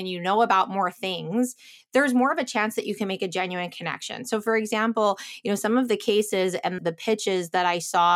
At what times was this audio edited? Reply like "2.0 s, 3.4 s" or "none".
6.8 s